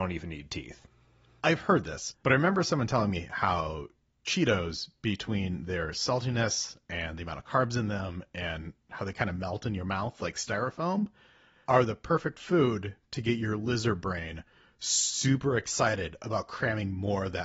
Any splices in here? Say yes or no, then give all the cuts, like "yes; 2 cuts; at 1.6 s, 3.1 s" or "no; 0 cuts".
yes; 1 cut; at 2.1 s